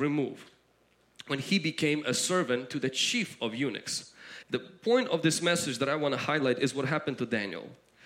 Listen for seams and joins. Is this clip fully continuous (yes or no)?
no